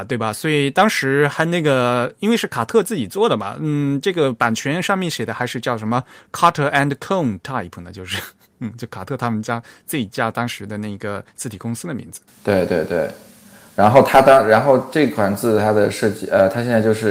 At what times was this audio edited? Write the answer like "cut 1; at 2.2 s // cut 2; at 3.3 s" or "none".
none